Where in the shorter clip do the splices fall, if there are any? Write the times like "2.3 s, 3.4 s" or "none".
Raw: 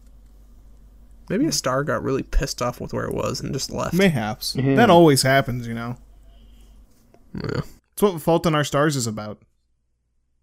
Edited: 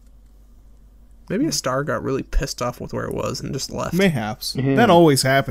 none